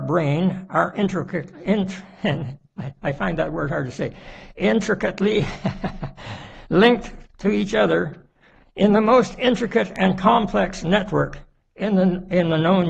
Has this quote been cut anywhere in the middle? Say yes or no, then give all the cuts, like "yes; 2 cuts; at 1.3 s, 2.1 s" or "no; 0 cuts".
no; 0 cuts